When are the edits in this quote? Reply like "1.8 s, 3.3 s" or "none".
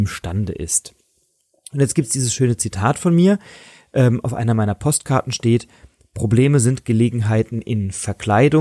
none